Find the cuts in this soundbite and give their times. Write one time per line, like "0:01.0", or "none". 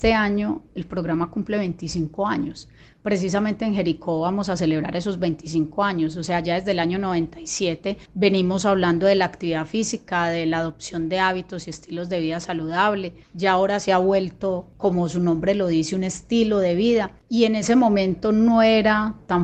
none